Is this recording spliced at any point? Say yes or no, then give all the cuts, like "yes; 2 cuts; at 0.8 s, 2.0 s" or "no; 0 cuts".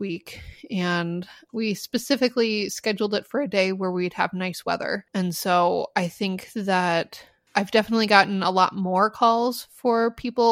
yes; 1 cut; at 5.1 s